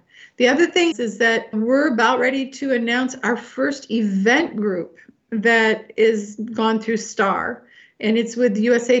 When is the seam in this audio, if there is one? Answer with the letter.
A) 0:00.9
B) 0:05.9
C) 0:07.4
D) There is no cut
A